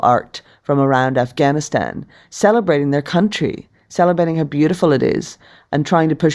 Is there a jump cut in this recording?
no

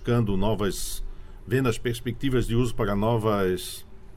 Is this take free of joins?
yes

